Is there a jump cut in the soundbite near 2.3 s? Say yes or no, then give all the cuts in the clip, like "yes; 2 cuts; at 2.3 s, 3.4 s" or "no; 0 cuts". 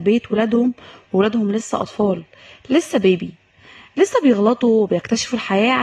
no; 0 cuts